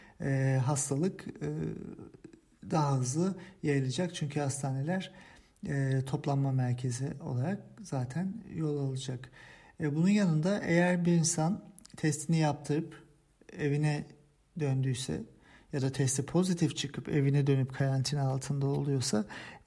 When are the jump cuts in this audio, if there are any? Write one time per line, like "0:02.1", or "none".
none